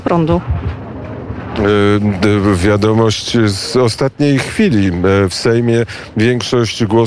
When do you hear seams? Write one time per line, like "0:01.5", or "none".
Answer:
none